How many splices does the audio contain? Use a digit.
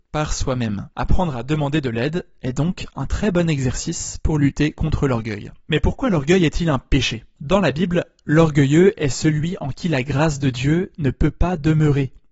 0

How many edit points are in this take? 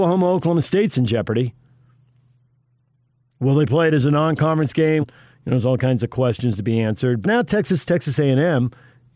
2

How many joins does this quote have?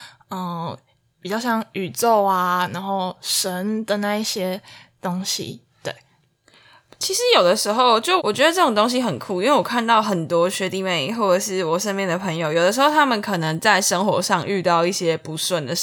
1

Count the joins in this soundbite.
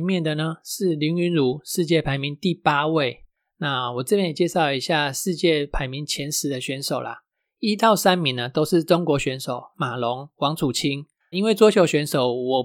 2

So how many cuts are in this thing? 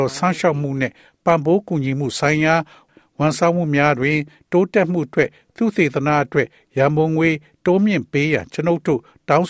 0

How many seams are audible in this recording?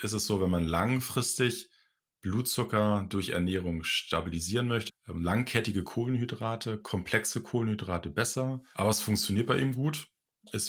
2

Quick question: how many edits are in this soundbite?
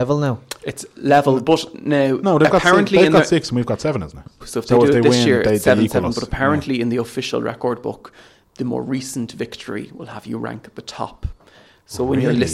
1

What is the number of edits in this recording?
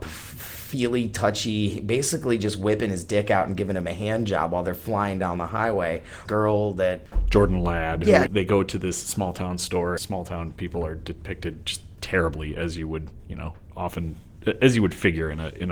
3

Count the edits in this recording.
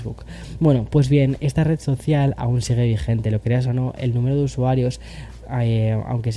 0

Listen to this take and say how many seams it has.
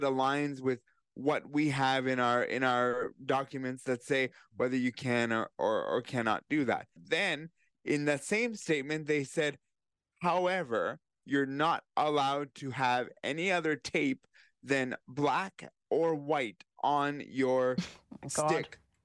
1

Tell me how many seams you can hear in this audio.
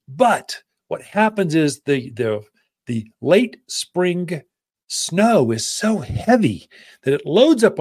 0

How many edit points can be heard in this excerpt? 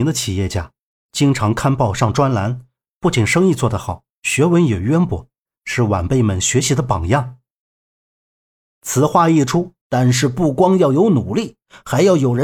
1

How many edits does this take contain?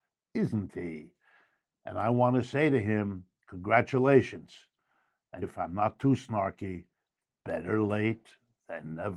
1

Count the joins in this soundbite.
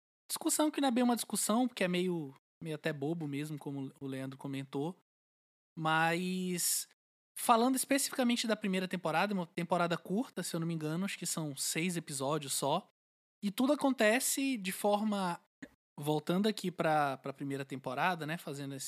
1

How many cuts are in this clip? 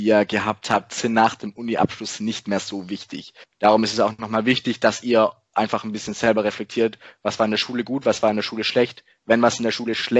1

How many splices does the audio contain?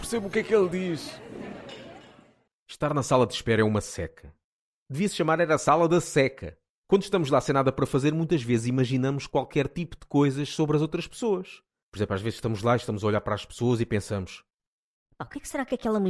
0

